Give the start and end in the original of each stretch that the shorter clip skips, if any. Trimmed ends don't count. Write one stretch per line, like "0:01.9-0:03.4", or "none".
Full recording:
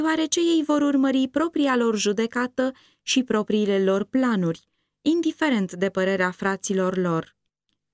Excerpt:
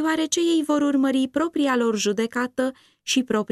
none